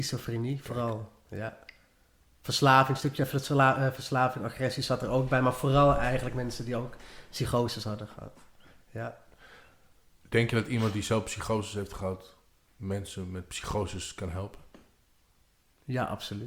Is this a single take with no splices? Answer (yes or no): yes